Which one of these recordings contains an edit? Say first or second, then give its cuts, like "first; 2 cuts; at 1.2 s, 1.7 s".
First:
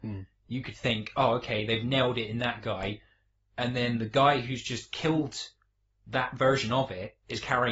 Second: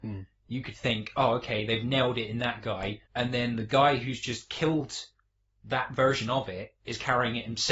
second; 1 cut; at 3.1 s